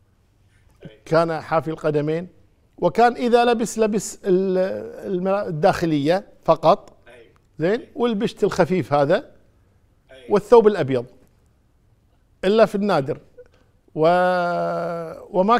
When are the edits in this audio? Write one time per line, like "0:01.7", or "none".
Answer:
none